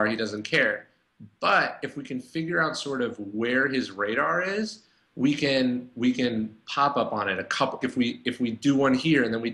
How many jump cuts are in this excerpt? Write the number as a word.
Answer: one